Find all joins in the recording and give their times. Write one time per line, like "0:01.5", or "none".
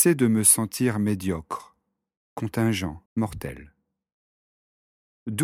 0:03.1